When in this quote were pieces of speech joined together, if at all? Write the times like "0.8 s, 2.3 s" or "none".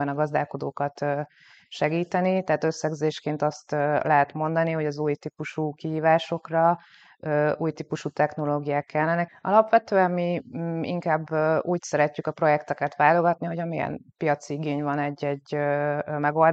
9.3 s